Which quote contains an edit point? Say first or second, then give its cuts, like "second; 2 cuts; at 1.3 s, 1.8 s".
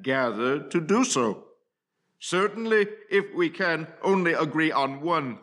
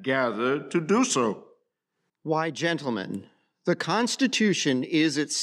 second; 1 cut; at 2.1 s